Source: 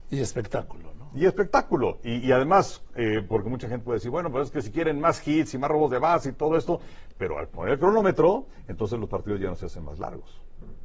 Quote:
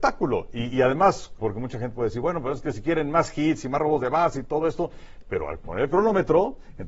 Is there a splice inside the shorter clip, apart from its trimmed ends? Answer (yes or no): yes